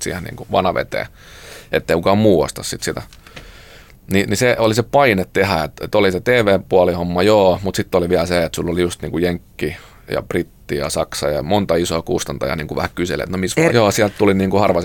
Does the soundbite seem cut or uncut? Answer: cut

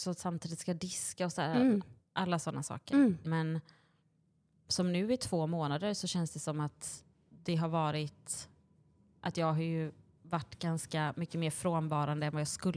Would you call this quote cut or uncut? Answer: cut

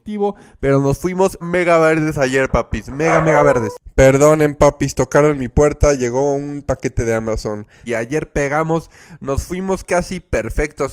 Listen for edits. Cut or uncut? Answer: cut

